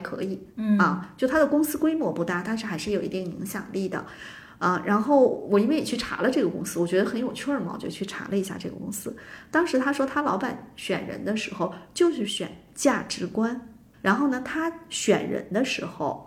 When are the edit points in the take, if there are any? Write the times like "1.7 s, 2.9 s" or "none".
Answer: 13.9 s